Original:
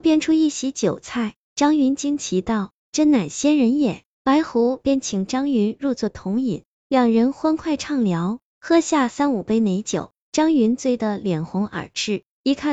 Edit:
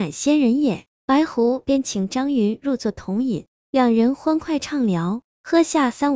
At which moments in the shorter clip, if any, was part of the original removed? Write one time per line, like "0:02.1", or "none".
none